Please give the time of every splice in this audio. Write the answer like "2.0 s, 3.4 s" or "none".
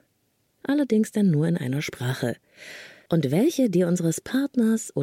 3.1 s